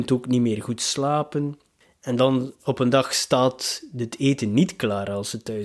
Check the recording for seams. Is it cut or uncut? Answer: uncut